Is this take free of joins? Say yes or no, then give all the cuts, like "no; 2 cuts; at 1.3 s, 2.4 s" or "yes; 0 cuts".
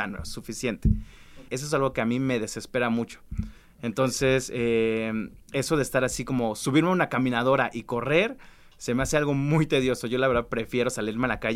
no; 1 cut; at 1.5 s